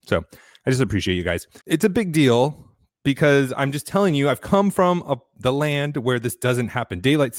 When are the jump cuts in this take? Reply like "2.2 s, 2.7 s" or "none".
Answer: 1.6 s